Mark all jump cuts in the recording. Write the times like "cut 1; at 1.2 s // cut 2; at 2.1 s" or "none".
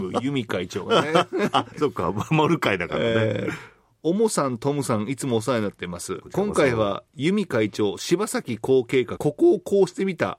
cut 1; at 9.2 s